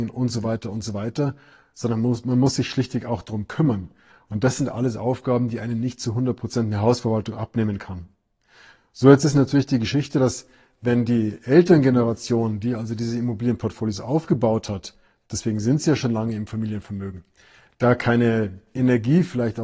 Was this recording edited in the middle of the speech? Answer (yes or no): no